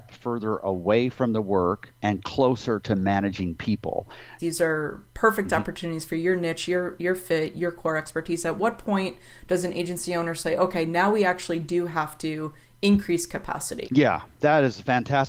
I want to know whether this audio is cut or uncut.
cut